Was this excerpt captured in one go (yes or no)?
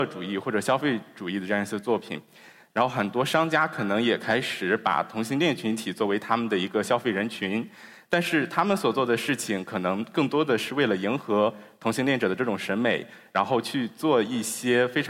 no